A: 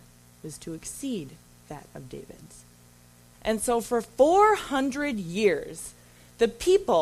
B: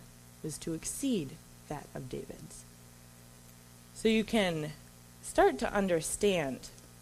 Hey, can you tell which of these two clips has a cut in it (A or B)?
A